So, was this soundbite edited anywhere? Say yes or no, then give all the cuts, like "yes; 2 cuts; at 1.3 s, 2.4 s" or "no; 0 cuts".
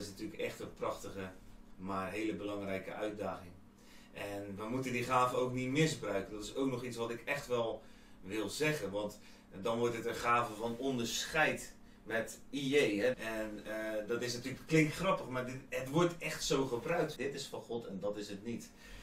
yes; 2 cuts; at 13.1 s, 17.2 s